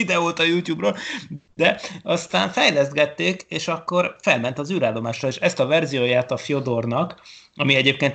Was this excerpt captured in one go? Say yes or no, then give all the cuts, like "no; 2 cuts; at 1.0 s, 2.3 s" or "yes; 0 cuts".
yes; 0 cuts